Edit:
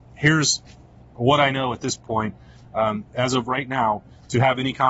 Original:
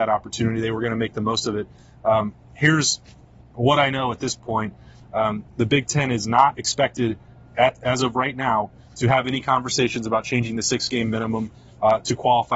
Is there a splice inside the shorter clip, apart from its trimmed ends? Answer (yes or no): yes